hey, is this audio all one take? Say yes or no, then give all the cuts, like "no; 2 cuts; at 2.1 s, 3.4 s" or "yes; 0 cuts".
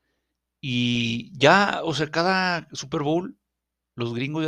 yes; 0 cuts